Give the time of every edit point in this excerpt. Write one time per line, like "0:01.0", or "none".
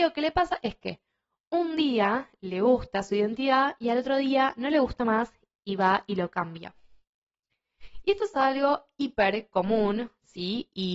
none